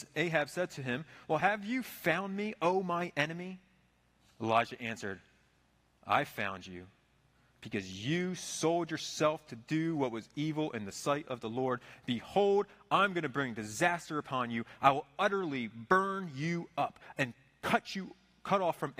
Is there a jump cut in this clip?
no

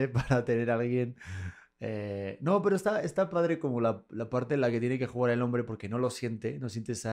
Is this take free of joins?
yes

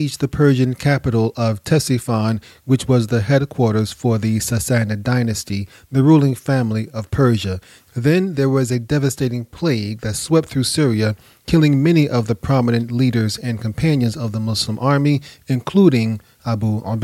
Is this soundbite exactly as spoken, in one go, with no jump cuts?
no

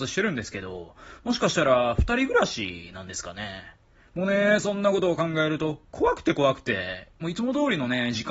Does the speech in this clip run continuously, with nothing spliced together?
yes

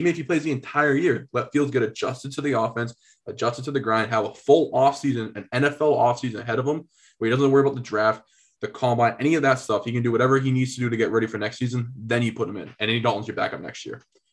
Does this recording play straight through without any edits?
yes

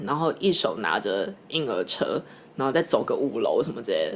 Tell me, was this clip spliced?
no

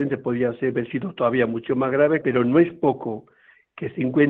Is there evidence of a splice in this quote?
yes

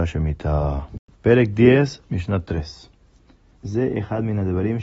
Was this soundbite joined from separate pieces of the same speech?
yes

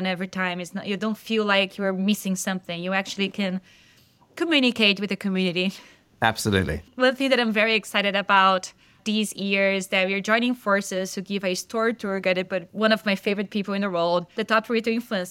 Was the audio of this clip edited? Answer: no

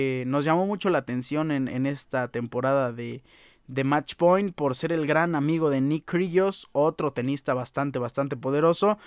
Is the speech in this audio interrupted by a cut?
no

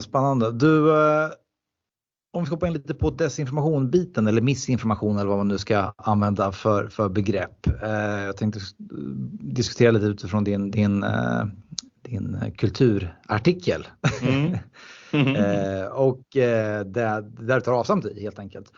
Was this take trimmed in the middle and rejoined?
no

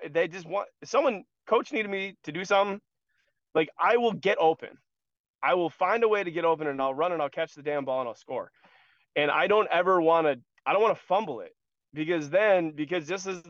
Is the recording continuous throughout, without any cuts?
yes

